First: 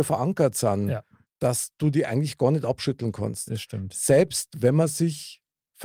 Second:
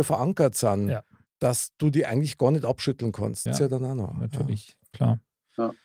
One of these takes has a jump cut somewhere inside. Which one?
second; 1 cut; at 3.5 s

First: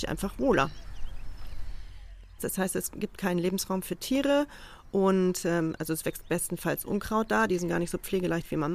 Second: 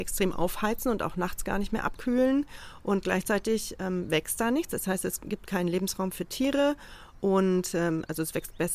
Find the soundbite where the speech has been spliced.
first; 1 cut; at 2.4 s

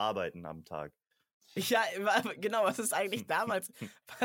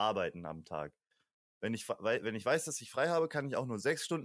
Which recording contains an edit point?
first; 1 cut; at 1.4 s

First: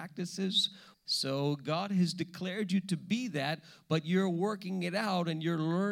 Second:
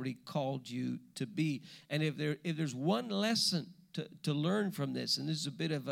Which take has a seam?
first; 1 cut; at 0.9 s

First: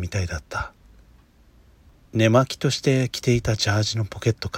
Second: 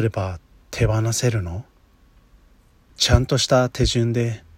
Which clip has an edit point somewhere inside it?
first; 1 cut; at 1.9 s

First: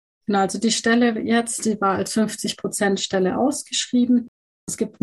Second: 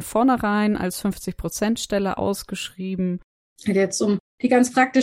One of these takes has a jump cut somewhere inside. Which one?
second; 1 cut; at 3.4 s

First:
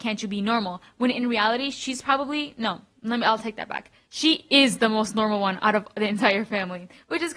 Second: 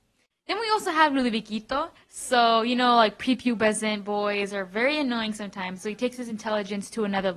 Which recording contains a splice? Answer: second; 1 cut; at 2.0 s

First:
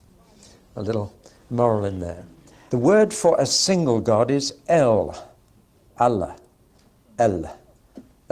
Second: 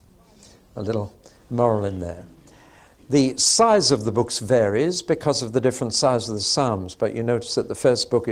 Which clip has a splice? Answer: first; 2 cuts; at 2.7 s, 5.9 s

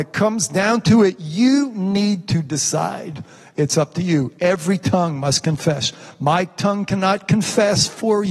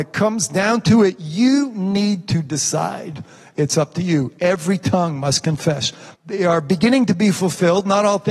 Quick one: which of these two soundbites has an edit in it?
second; 1 cut; at 6.1 s

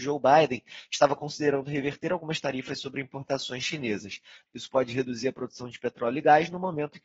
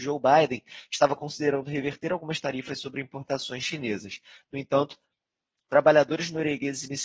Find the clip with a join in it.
first; 1 cut; at 4.5 s

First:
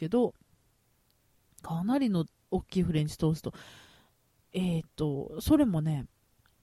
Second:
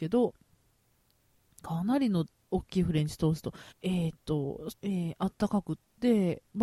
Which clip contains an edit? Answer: second; 2 cuts; at 3.7 s, 4.7 s

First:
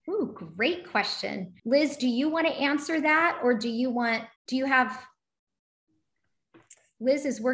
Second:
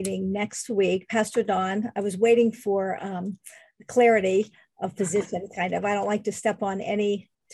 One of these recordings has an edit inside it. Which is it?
first; 2 cuts; at 1.6 s, 4.4 s

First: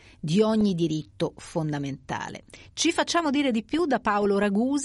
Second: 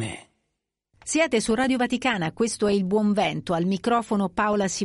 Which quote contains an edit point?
first; 1 cut; at 2.6 s

